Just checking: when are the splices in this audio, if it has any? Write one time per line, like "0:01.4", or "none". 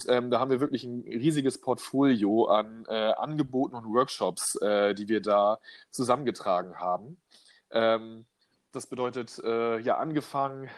none